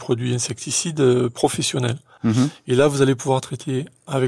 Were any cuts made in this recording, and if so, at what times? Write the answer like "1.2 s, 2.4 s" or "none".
2.2 s